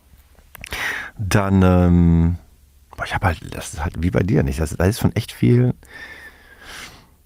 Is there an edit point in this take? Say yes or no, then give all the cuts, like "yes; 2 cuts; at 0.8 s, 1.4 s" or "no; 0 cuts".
no; 0 cuts